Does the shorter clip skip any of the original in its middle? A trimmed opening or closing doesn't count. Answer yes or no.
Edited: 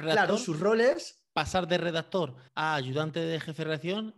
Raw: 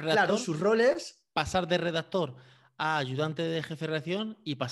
yes